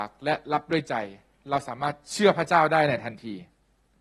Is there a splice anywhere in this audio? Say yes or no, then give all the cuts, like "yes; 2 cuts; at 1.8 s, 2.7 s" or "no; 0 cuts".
no; 0 cuts